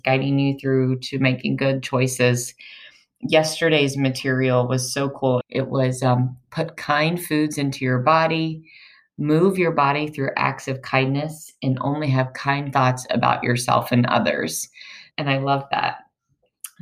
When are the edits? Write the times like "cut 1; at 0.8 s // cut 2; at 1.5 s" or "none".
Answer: cut 1; at 5.4 s // cut 2; at 15.1 s